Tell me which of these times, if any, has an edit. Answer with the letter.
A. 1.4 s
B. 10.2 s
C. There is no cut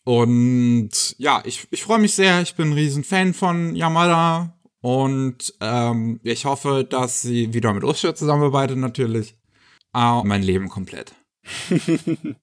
B